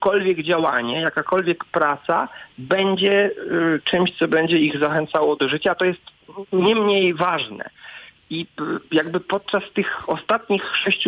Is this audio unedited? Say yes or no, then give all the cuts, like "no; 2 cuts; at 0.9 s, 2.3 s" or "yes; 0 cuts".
yes; 0 cuts